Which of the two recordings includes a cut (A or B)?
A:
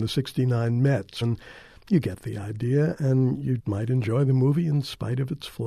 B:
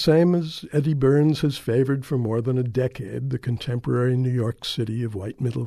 A